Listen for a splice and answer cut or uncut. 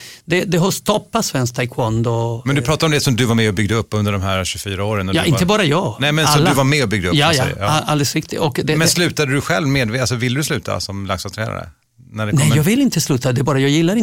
uncut